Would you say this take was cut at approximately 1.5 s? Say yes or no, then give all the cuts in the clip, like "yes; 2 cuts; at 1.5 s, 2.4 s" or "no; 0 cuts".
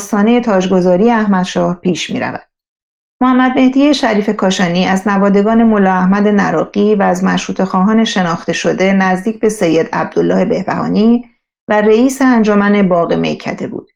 no; 1 cut; at 3.0 s